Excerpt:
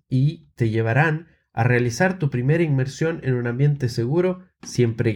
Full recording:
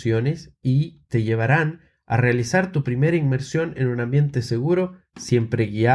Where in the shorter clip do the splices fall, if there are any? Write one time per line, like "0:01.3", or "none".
none